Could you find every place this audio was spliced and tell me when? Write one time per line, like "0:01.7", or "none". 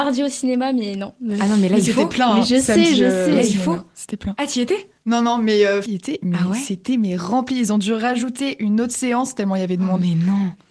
0:05.9